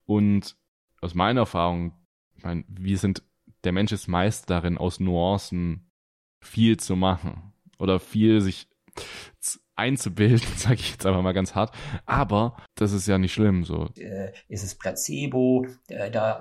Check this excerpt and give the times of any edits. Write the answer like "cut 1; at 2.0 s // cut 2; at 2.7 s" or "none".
cut 1; at 12.7 s // cut 2; at 14.0 s